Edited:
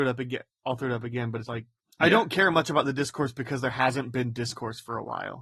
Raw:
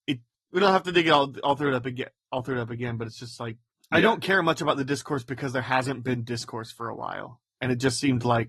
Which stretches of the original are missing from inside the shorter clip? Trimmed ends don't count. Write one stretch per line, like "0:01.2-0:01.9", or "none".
0:03.1-0:03.4